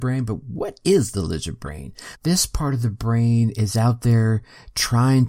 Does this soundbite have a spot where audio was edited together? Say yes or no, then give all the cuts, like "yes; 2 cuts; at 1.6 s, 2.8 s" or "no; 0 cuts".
yes; 1 cut; at 2.1 s